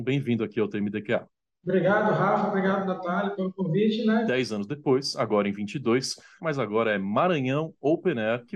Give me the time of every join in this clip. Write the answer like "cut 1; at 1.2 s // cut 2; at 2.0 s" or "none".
cut 1; at 4.3 s // cut 2; at 6.4 s